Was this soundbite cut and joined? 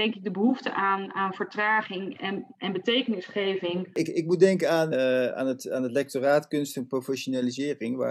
yes; 1 cut; at 4.9 s

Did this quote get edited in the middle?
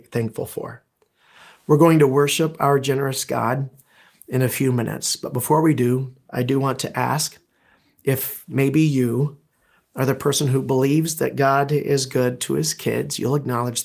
no; 0 cuts

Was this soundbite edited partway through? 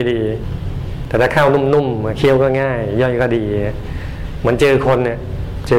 no; 0 cuts

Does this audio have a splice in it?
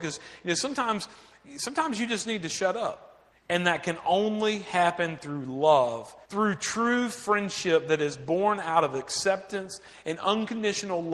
yes; 2 cuts; at 3.3 s, 6.2 s

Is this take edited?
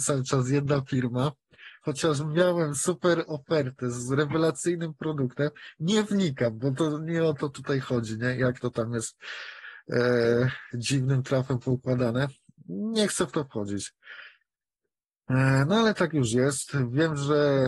no; 0 cuts

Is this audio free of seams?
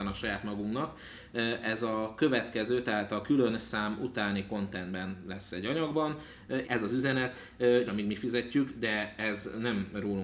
no; 2 cuts; at 6.6 s, 7.9 s

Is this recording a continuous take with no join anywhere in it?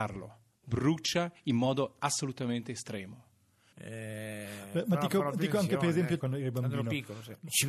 no; 2 cuts; at 3.7 s, 6.2 s

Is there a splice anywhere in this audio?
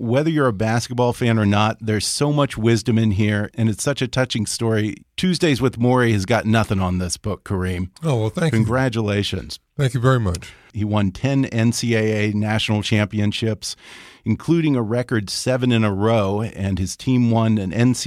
yes; 1 cut; at 10.7 s

